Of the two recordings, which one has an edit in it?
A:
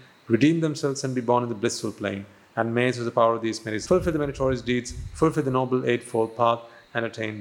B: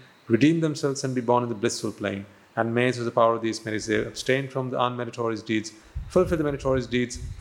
A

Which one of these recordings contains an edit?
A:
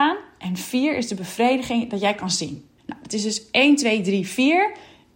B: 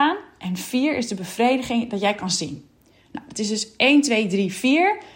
A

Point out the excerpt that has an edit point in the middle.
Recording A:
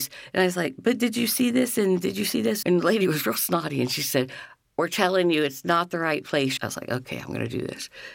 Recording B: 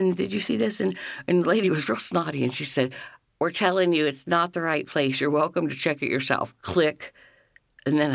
A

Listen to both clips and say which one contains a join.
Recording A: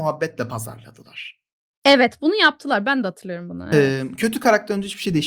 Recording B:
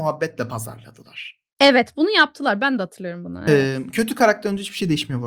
B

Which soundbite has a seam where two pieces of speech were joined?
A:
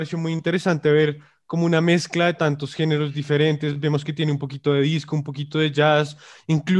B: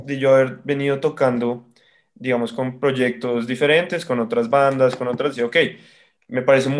B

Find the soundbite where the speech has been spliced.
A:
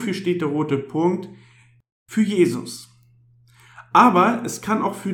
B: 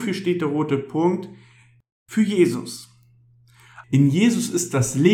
B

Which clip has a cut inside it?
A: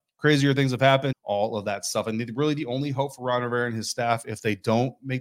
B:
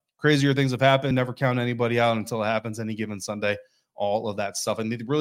A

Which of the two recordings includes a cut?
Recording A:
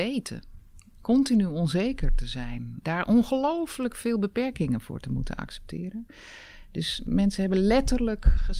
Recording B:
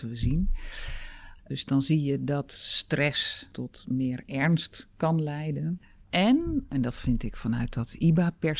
B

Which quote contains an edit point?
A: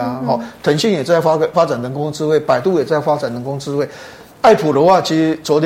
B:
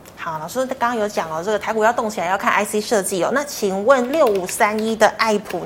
A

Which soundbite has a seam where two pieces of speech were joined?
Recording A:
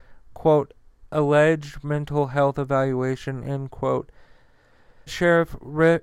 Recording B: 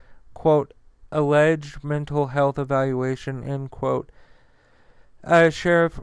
A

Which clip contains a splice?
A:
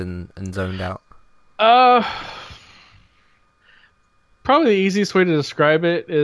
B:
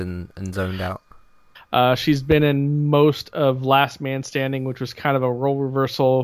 B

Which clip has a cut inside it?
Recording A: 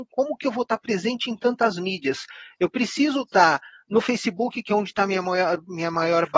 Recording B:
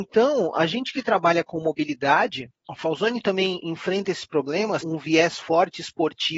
B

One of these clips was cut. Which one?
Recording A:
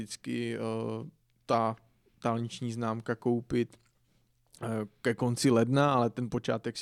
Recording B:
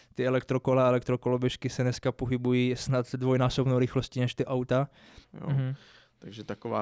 B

